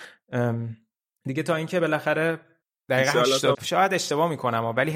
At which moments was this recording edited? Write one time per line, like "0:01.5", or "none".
0:03.5